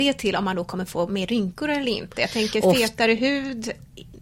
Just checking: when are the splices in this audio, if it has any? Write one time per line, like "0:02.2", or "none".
none